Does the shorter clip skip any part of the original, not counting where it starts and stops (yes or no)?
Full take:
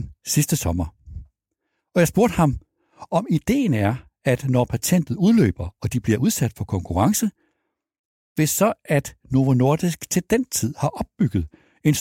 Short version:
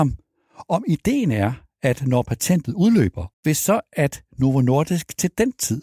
yes